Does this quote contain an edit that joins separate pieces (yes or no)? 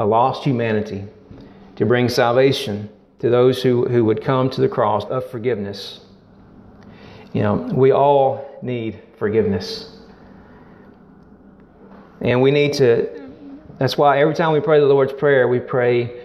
yes